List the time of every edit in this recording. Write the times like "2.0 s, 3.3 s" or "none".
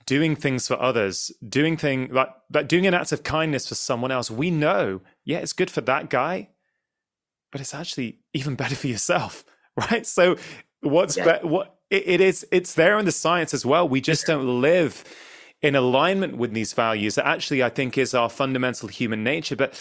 none